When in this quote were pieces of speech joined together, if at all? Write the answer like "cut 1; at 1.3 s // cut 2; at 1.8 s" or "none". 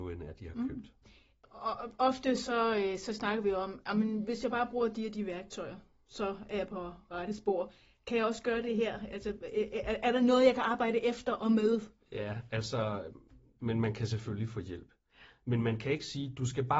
cut 1; at 13.6 s